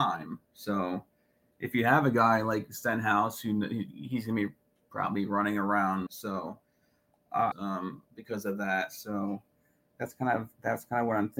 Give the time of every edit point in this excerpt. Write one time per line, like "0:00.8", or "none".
0:06.1
0:07.5

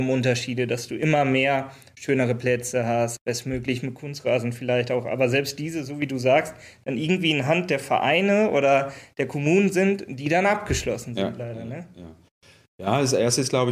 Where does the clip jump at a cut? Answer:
0:03.2

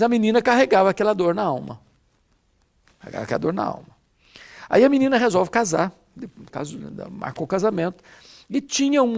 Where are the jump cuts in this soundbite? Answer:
0:06.5

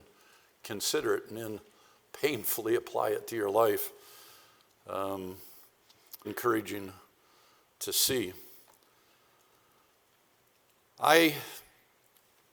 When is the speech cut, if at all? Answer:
0:06.2

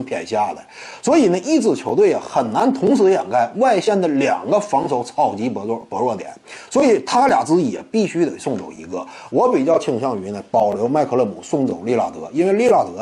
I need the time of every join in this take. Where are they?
none

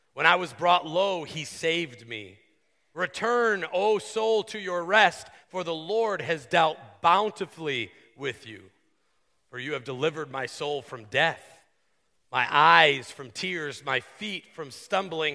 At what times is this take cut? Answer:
none

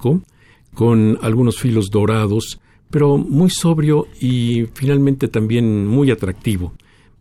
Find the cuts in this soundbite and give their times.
none

